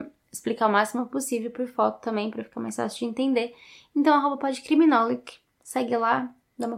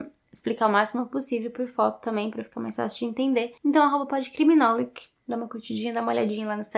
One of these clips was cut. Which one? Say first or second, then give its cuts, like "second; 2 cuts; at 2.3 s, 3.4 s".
second; 2 cuts; at 3.6 s, 5.2 s